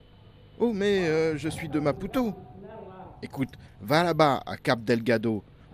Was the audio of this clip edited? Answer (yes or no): no